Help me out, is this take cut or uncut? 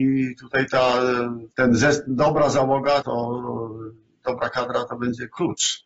cut